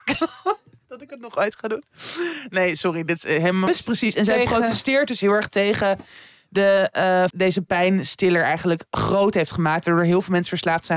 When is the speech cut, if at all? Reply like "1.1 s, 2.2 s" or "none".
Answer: 3.7 s, 7.3 s